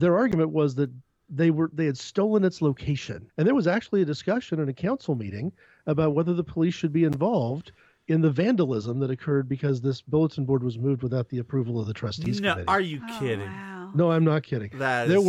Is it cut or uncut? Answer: cut